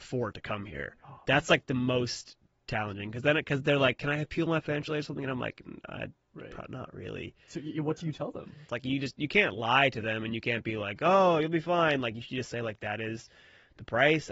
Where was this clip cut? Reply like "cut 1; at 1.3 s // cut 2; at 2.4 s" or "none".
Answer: cut 1; at 8.7 s